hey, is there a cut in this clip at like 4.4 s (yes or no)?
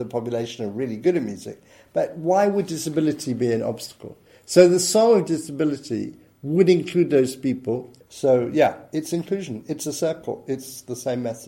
no